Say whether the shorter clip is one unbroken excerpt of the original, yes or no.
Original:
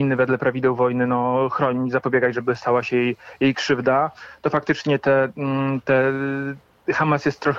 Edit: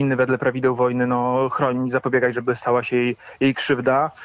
yes